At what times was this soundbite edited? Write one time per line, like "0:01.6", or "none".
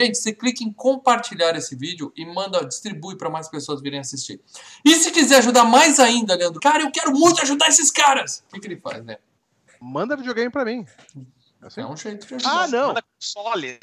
0:06.6

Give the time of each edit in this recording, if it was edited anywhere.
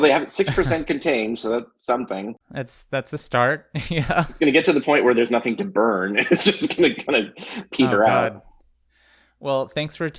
0:02.4

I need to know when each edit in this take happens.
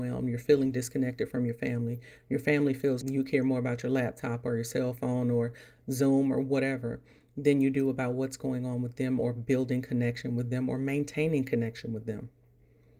0:03.0

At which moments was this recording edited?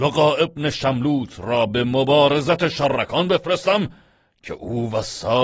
none

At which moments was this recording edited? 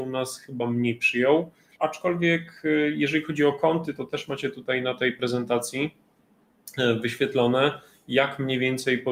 0:01.8

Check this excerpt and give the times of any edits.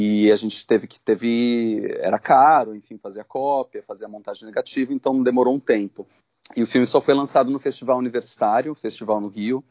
none

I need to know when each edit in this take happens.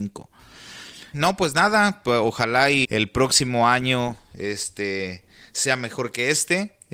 0:01.1
0:02.8

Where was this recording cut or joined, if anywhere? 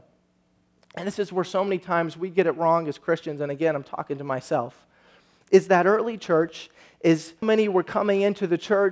0:07.4

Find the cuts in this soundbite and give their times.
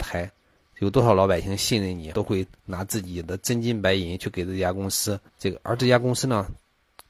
0:02.1
0:05.3

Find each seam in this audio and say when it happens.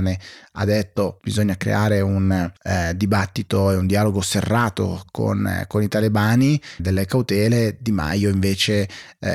0:02.6
0:06.8

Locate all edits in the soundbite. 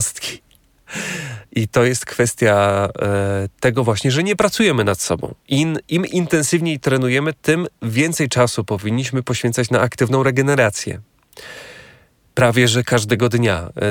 none

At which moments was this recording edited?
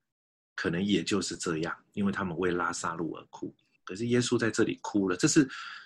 0:03.8

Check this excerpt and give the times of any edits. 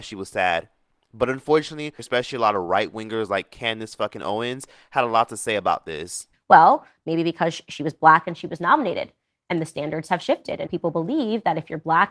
0:02.0
0:06.3
0:10.7

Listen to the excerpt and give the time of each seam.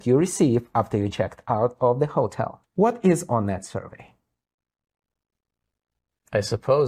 0:02.6

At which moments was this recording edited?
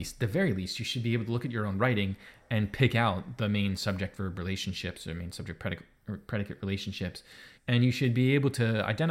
0:07.6

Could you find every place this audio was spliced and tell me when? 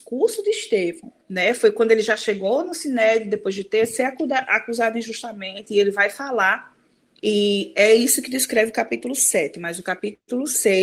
0:01.2

